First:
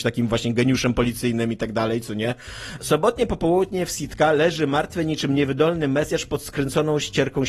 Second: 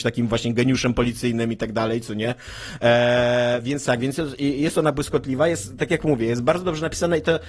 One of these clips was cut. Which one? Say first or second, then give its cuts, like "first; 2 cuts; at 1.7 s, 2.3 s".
first; 1 cut; at 2.8 s